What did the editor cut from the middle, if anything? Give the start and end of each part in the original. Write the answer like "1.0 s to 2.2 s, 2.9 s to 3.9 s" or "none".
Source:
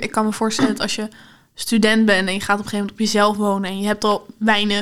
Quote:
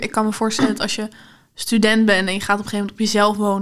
none

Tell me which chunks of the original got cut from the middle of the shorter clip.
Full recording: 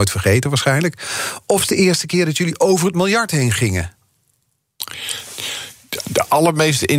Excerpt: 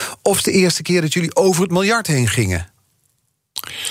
none

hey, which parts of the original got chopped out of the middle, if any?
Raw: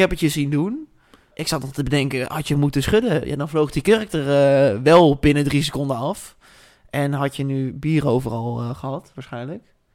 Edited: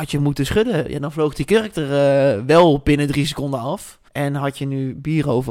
6.4 s to 6.9 s

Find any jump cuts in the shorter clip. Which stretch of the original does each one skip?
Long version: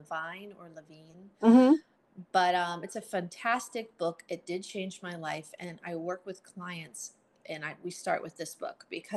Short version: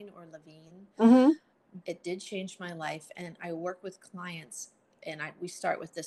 2.2 s to 4.2 s

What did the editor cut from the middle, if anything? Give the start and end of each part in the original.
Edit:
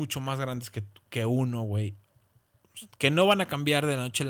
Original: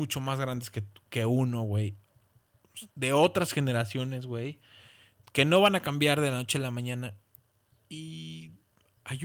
2.9 s to 5.2 s

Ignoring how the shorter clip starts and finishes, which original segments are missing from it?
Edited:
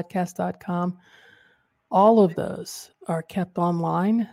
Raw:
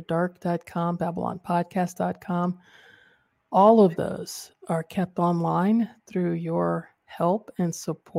none

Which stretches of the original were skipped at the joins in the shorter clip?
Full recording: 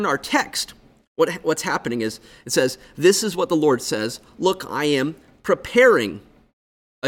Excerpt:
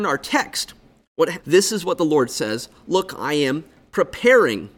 1.4 s to 2.9 s

